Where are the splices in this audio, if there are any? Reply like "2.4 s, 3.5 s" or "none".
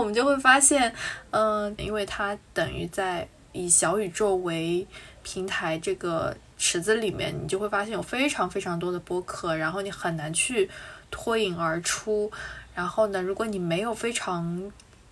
1.8 s